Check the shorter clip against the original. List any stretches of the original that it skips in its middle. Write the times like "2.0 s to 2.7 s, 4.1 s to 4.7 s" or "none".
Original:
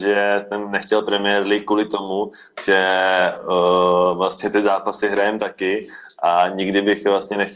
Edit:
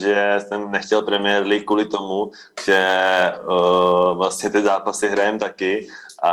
none